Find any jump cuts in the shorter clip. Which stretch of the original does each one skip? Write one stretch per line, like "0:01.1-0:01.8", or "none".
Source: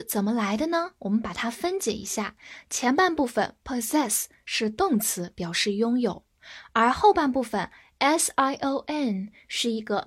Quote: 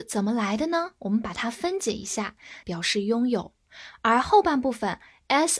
0:02.6-0:05.3